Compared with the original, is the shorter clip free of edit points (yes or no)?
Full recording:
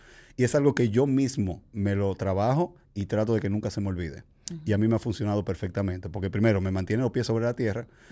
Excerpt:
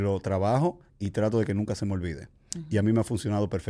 yes